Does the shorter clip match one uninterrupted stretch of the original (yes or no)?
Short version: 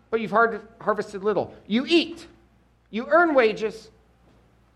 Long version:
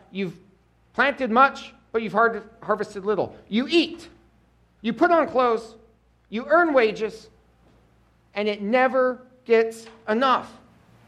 no